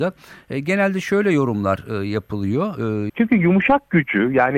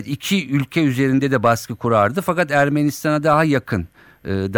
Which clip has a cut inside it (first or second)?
first